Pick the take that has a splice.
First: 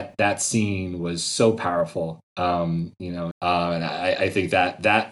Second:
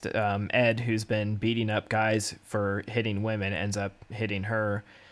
first; 2 cuts; at 2.2 s, 3.3 s

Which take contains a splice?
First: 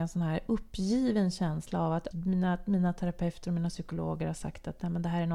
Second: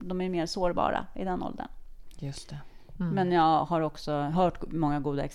first; 1 cut; at 2.1 s

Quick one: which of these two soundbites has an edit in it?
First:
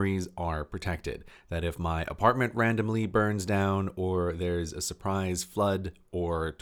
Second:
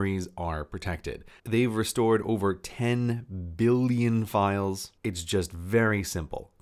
second; 2 cuts; at 1.4 s, 5.0 s

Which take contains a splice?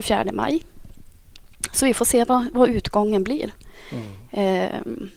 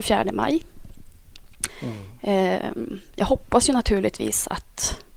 second; 1 cut; at 1.7 s

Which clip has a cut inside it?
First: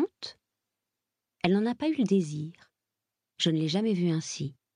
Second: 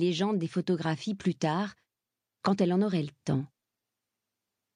first; 1 cut; at 3.3 s

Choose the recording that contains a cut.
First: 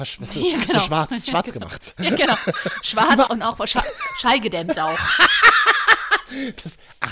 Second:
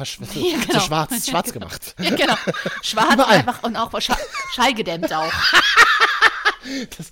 first; 1 cut; at 3.3 s

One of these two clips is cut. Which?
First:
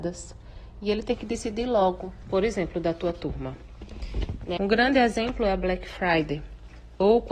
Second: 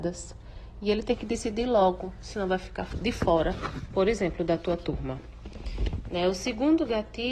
first; 2 cuts; at 2.2 s, 4.6 s

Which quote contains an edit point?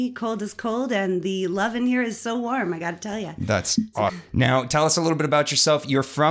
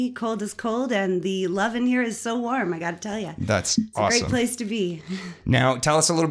first; 1 cut; at 4.1 s

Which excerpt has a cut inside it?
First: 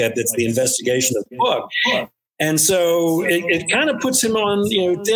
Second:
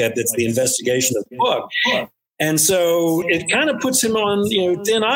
second; 1 cut; at 3.2 s

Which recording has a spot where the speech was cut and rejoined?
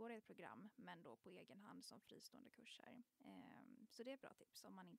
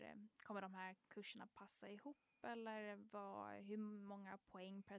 first; 1 cut; at 3.1 s

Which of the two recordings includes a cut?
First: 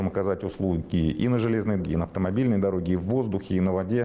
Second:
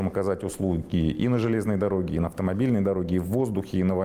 first; 1 cut; at 1.8 s

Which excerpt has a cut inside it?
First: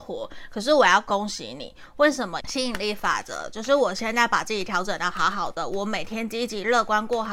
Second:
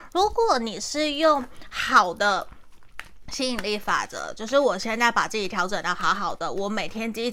first; 1 cut; at 2.4 s

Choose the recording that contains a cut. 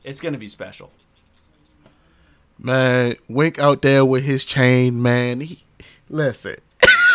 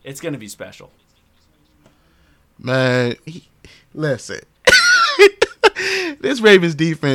second; 1 cut; at 3.3 s

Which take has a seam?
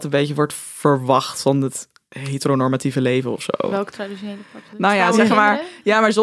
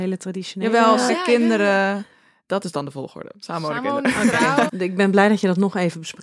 second; 2 cuts; at 1.1 s, 4.7 s

